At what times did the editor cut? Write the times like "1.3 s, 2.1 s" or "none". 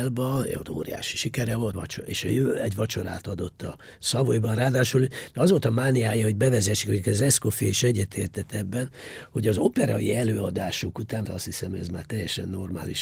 1.7 s, 11.3 s